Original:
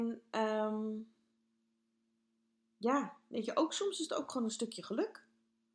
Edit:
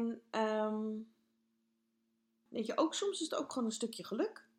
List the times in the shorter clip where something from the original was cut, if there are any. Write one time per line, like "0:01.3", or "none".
0:02.5